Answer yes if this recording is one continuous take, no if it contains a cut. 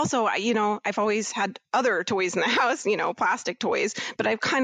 yes